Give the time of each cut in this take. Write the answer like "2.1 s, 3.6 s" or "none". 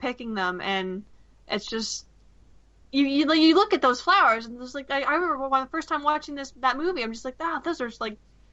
none